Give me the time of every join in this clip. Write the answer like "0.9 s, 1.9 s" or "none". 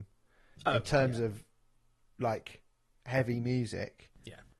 none